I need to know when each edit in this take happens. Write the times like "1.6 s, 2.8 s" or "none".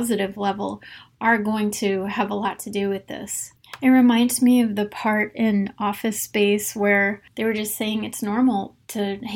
none